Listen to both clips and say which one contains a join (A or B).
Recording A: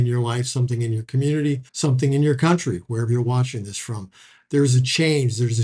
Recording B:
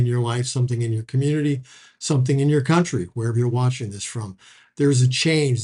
A